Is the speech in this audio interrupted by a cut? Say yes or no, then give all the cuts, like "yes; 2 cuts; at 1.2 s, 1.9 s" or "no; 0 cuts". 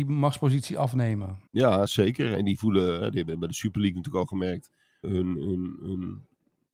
yes; 2 cuts; at 1.5 s, 5.0 s